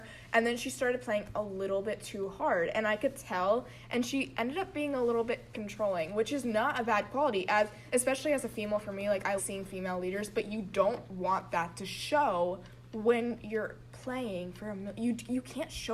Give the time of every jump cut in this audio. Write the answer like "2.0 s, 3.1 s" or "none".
5.5 s, 9.4 s